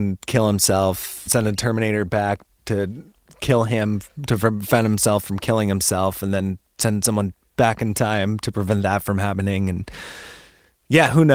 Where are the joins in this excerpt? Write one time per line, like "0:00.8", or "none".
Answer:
0:01.3